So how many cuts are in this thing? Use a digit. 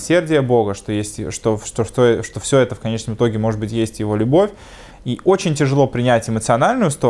1